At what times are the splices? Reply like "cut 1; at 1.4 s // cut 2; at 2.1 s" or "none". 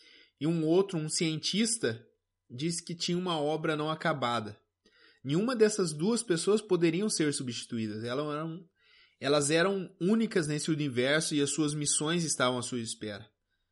none